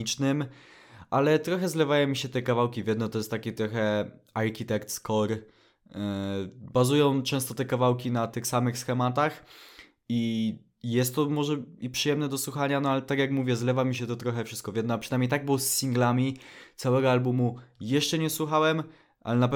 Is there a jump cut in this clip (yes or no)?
no